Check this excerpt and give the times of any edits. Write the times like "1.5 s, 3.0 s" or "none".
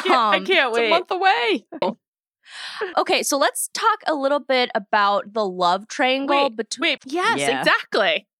1.8 s, 2.9 s, 7.0 s